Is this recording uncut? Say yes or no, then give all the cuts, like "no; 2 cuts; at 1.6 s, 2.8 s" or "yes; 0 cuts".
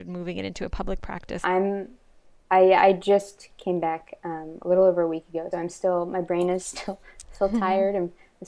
no; 2 cuts; at 1.4 s, 5.5 s